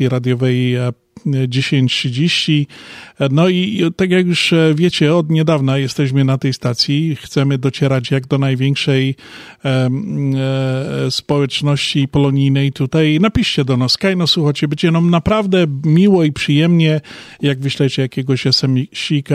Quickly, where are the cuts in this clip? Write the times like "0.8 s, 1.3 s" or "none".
none